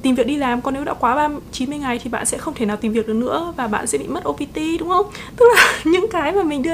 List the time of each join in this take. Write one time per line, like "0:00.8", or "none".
0:05.3